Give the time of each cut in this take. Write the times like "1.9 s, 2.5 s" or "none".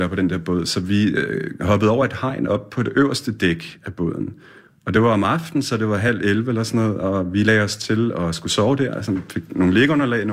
none